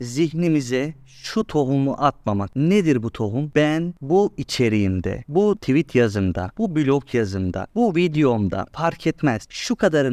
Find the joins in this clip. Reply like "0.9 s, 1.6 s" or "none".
none